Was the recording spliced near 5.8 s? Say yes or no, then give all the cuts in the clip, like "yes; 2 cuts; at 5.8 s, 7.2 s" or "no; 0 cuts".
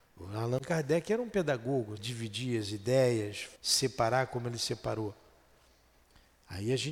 no; 2 cuts; at 2.0 s, 3.6 s